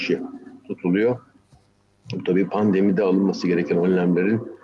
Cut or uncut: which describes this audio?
uncut